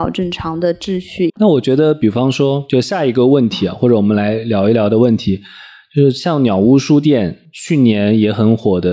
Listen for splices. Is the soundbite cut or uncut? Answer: cut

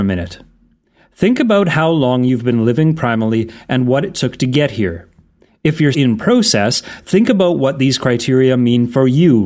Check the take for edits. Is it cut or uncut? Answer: cut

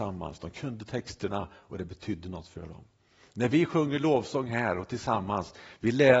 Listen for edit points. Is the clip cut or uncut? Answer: uncut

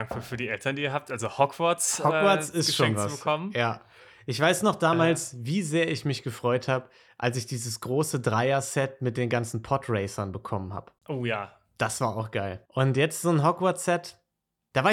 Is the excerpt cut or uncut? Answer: cut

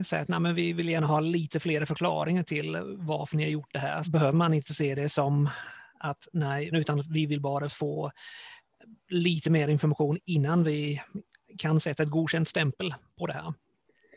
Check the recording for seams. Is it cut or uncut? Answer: cut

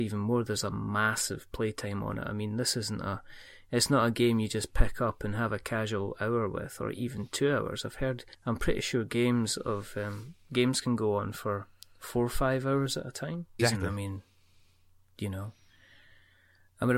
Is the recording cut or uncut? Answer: cut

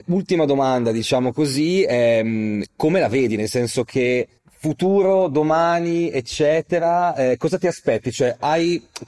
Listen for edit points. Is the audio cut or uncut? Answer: cut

